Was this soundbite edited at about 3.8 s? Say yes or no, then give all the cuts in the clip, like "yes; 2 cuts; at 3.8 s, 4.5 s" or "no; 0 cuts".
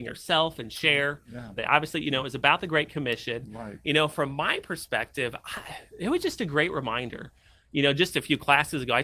no; 1 cut; at 1.6 s